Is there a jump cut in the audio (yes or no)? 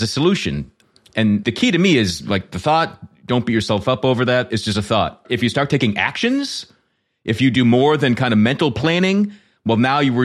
no